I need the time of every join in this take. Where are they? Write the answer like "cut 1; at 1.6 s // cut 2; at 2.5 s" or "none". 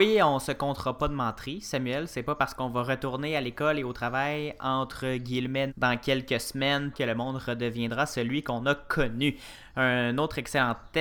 cut 1; at 5.7 s // cut 2; at 6.9 s